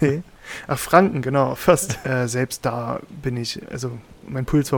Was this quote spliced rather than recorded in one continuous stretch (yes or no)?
yes